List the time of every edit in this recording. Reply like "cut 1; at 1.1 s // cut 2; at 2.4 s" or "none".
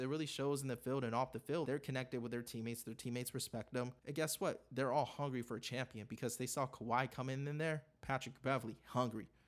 cut 1; at 1.6 s // cut 2; at 4.0 s

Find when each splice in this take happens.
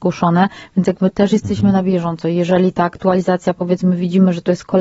none

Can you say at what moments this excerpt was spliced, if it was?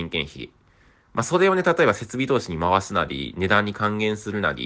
none

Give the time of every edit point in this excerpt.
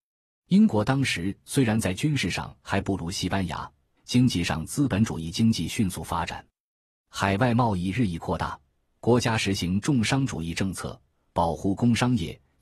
cut 1; at 4.0 s

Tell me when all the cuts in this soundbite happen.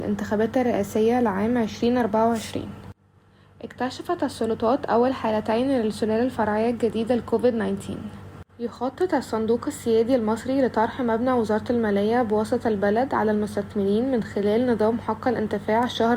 cut 1; at 8.5 s

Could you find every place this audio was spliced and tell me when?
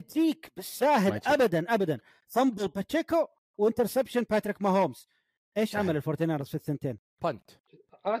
cut 1; at 1.7 s

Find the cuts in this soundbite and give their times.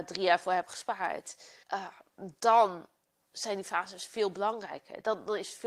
cut 1; at 1.6 s

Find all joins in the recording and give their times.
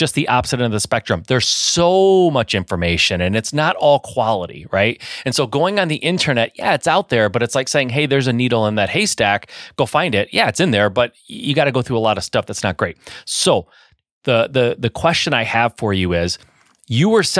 none

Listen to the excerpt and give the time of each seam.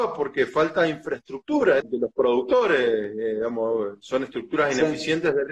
cut 1; at 1.8 s

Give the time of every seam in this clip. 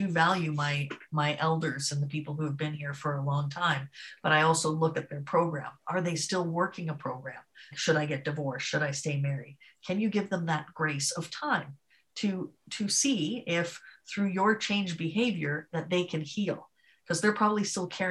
cut 1; at 7.7 s

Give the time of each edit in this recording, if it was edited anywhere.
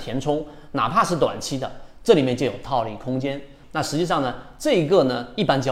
cut 1; at 3.6 s

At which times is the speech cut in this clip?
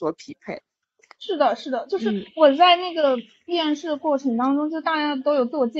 none

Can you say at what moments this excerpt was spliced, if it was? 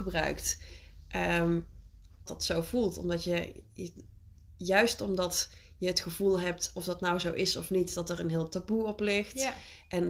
cut 1; at 2.3 s

